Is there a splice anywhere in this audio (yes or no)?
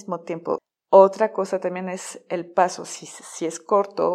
no